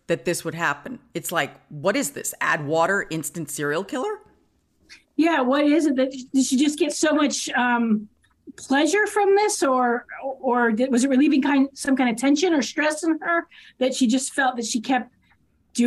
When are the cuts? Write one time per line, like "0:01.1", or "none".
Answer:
none